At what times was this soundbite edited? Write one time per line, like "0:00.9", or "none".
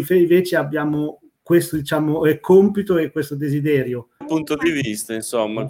0:04.2